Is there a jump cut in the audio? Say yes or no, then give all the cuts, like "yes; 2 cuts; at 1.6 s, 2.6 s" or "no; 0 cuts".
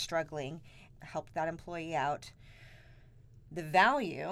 yes; 1 cut; at 1.0 s